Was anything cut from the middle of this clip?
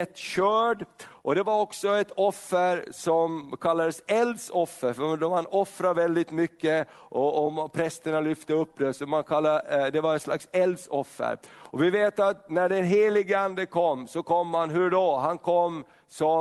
no; 0 cuts

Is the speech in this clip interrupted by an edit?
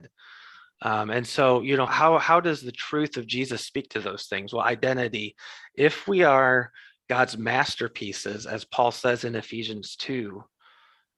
yes; 1 cut; at 1.9 s

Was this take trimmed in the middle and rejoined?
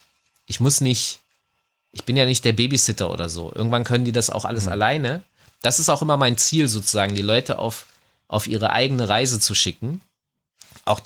no; 0 cuts

